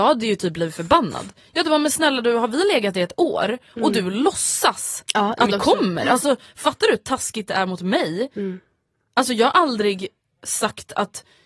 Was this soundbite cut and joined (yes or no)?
yes